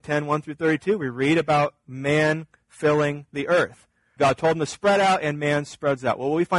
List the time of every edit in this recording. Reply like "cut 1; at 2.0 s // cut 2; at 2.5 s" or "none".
cut 1; at 4.2 s